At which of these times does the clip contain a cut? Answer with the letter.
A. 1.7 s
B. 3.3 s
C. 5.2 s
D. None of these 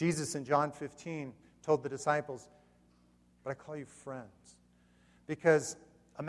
B